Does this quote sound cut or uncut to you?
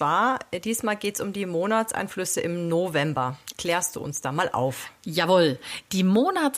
cut